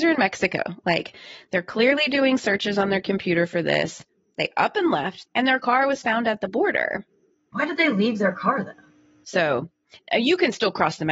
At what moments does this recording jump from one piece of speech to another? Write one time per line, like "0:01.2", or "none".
0:05.3
0:09.2